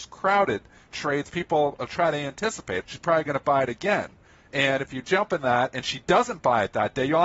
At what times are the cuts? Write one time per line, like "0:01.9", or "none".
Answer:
0:02.8

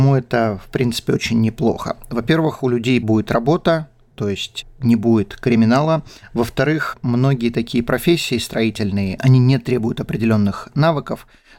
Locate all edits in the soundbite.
none

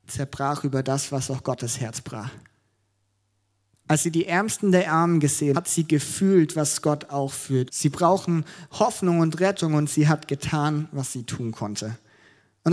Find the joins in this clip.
0:05.5
0:07.7

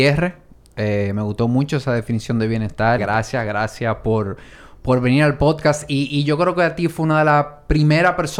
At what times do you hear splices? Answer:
0:03.0

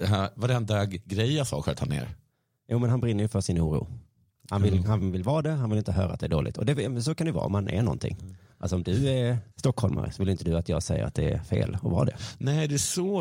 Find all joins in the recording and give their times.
0:09.5

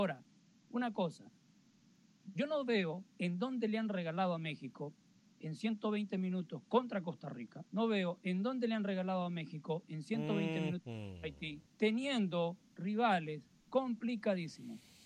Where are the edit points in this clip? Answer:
0:07.7
0:11.7

